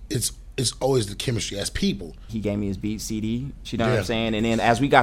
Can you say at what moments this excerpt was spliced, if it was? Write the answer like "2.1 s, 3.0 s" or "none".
2.3 s, 3.6 s